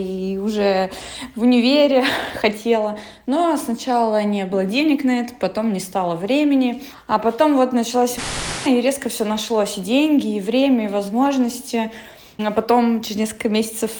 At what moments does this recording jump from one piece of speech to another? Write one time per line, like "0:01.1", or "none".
none

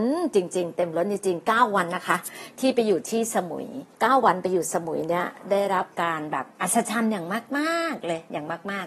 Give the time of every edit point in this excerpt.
0:01.9
0:03.9
0:06.5

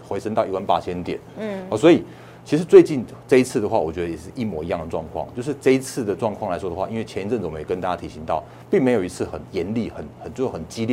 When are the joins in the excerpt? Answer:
none

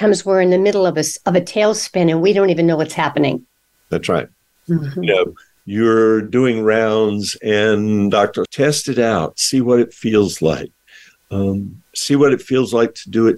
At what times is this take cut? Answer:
0:04.6
0:08.5

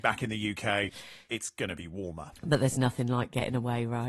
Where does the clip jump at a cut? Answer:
none

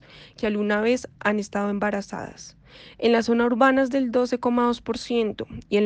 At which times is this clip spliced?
none

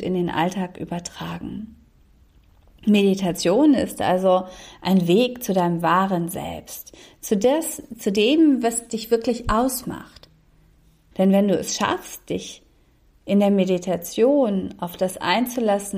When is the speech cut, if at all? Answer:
0:11.1

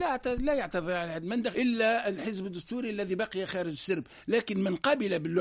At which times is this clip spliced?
0:01.5

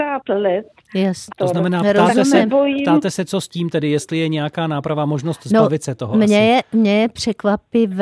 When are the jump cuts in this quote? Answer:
0:01.3

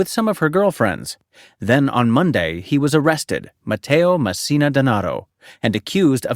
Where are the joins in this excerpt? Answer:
0:03.6

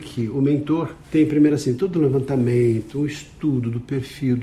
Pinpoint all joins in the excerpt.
0:01.0

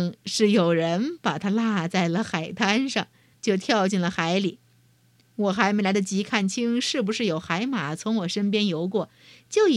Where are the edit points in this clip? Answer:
0:03.3

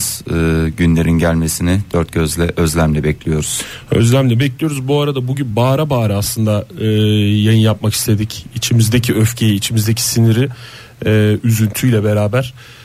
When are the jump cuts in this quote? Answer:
none

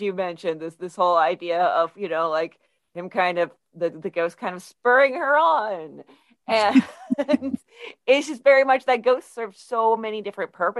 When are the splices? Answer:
none

